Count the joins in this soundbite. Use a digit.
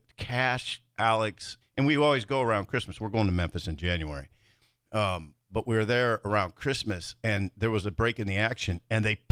1